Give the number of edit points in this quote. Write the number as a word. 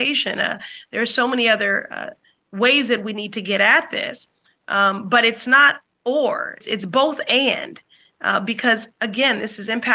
one